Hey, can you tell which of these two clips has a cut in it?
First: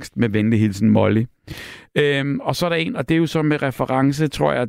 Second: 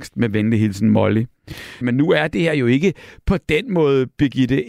second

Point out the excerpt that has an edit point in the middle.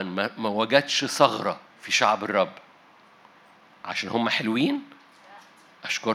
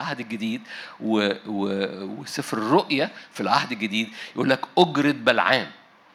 first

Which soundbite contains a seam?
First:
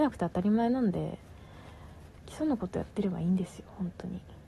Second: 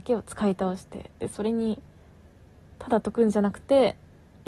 first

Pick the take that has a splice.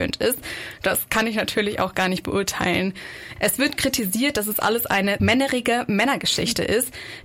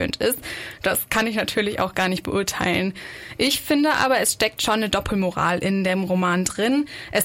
first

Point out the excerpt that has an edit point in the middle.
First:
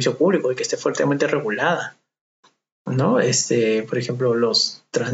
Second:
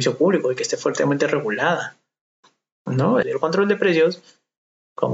second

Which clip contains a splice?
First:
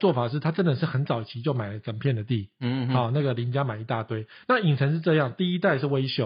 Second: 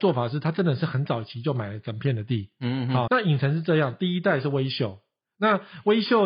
second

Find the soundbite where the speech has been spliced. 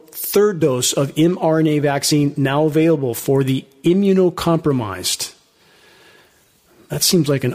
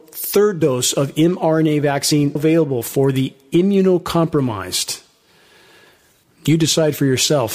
second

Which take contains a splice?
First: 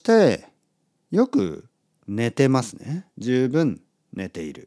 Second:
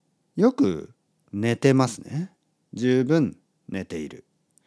first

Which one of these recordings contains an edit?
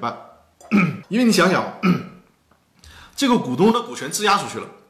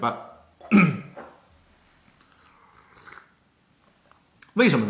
first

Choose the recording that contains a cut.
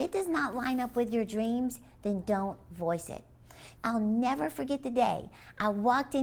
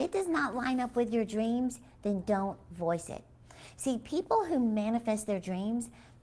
first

